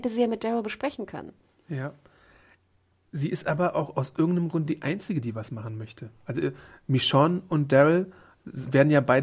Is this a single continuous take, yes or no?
yes